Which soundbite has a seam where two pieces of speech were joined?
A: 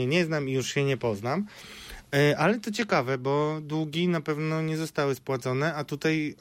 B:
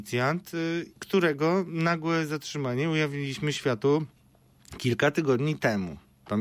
B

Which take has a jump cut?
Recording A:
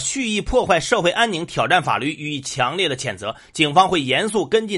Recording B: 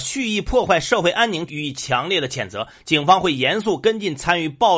B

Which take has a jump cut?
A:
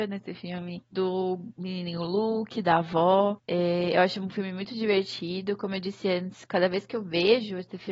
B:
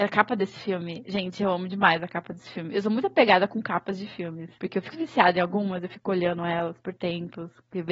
B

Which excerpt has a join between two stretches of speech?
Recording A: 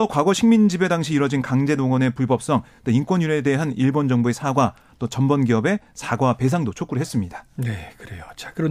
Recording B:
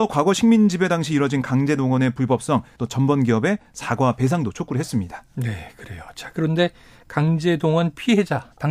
B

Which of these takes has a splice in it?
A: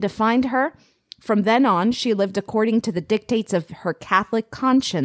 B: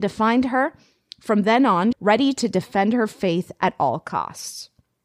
B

